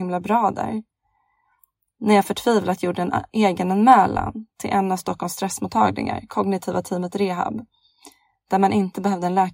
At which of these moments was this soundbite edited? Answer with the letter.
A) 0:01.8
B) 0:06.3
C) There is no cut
C